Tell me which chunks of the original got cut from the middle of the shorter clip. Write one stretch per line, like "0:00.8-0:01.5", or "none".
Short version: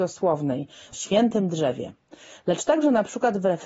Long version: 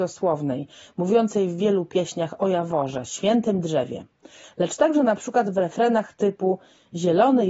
0:00.9-0:03.0